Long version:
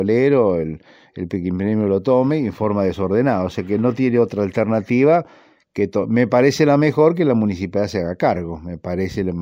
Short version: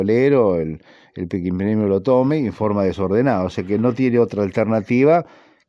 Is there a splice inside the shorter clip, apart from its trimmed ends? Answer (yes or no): no